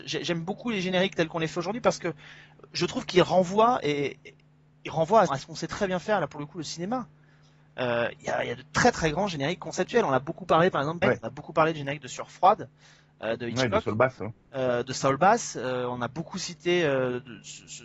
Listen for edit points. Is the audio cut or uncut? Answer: cut